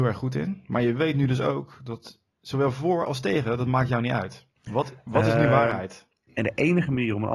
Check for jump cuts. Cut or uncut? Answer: cut